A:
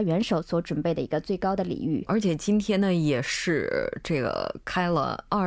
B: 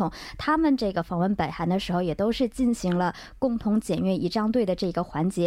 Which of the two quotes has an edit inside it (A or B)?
A